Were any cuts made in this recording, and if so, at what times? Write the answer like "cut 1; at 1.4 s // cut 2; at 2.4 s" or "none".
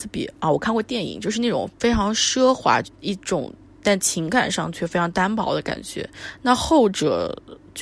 cut 1; at 2.8 s